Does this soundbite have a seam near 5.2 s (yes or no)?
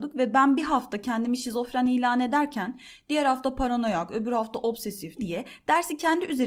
yes